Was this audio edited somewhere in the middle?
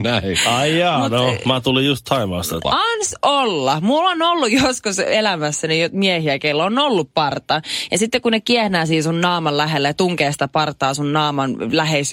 yes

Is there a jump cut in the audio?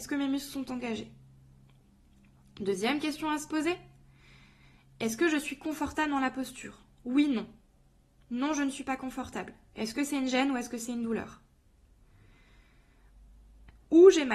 no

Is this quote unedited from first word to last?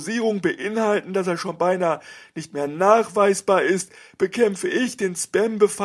yes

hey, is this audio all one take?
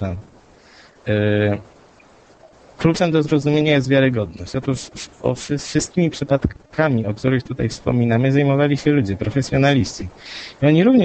yes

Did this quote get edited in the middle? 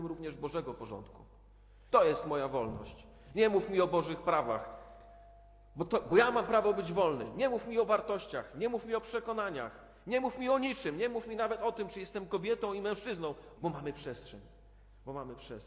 yes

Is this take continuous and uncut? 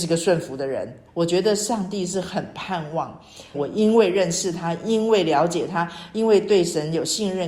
no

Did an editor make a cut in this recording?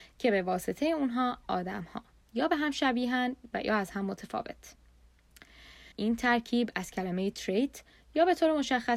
yes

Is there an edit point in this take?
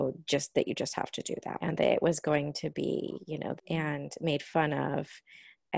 yes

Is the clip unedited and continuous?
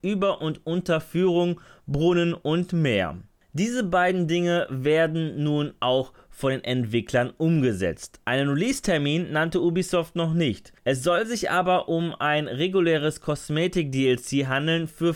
yes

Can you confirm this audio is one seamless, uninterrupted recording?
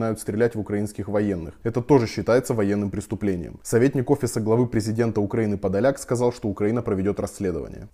yes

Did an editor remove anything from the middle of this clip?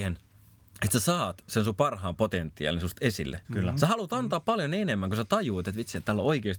yes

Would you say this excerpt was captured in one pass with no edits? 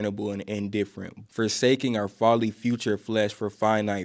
no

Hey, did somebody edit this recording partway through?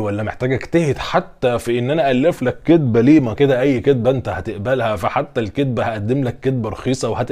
yes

